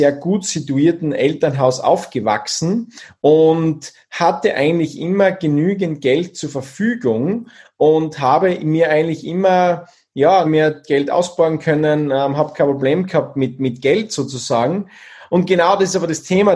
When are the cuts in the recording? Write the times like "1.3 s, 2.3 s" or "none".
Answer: 10.5 s